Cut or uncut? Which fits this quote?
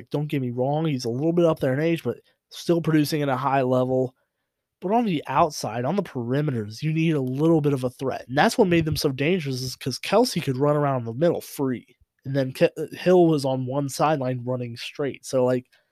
uncut